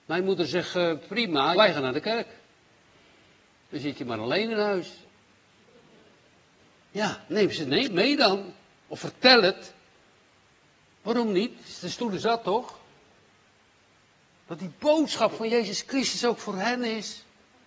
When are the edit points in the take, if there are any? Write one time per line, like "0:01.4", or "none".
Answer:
0:01.5